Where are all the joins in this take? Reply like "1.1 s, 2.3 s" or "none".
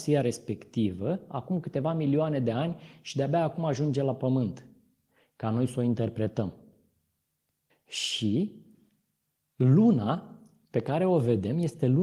7.7 s